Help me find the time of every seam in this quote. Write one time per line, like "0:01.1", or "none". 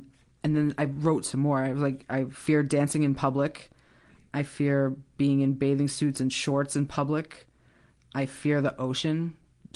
none